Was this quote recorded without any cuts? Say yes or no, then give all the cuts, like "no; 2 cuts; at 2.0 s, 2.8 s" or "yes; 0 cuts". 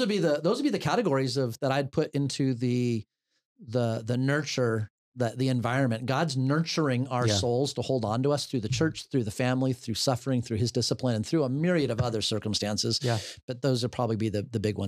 yes; 0 cuts